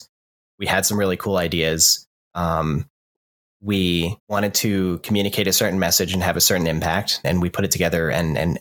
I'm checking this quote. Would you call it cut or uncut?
cut